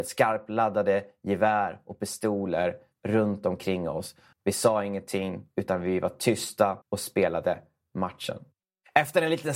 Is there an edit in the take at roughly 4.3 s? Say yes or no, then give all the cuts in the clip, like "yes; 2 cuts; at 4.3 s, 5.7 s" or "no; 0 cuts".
yes; 2 cuts; at 4.3 s, 6.8 s